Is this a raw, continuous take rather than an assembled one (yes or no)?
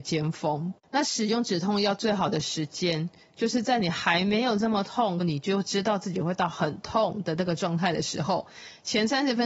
no